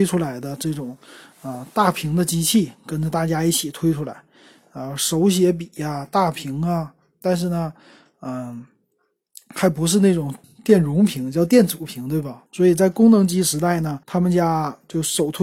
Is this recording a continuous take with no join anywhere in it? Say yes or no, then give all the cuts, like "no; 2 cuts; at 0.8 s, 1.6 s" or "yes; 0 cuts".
no; 3 cuts; at 10.4 s, 12.5 s, 14.0 s